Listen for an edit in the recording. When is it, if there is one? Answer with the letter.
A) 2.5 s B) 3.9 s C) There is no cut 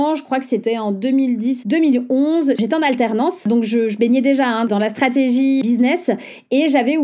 A